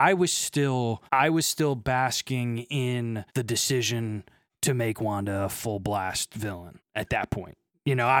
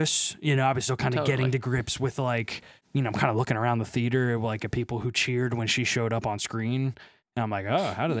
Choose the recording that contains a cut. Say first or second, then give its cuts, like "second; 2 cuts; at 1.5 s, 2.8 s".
first; 2 cuts; at 1.1 s, 3.3 s